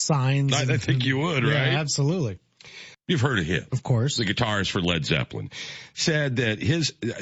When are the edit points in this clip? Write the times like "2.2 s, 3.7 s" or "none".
2.9 s